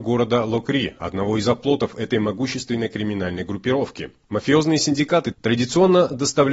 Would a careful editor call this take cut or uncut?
cut